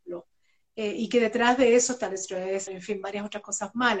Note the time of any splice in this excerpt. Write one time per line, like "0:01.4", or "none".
0:02.7